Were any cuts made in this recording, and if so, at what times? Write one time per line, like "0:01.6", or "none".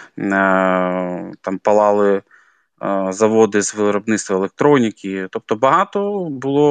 none